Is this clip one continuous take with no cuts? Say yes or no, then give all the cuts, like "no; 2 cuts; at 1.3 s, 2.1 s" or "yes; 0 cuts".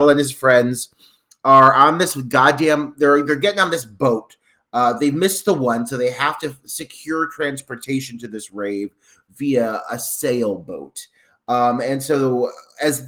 yes; 0 cuts